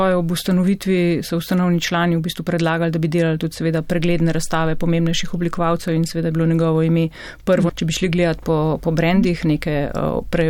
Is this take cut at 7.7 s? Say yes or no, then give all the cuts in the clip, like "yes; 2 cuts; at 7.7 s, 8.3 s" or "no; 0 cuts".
yes; 1 cut; at 7.7 s